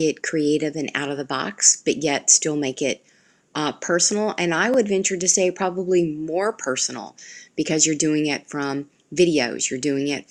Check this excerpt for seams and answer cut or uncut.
uncut